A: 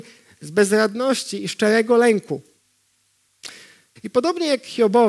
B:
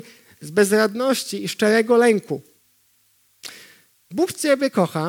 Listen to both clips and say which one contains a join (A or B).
A